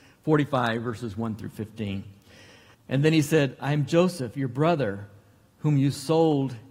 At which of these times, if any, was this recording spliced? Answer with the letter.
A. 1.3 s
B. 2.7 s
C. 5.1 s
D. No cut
B